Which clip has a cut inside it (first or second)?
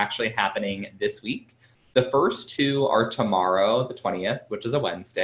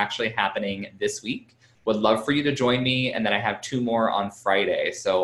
second